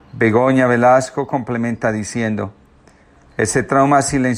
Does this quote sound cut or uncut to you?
uncut